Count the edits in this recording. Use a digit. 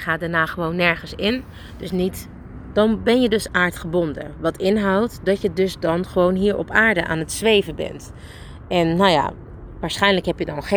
1